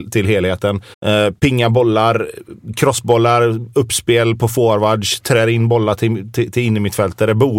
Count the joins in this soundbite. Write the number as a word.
one